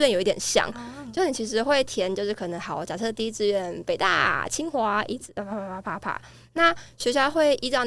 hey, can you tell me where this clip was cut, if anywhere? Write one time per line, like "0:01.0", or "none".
none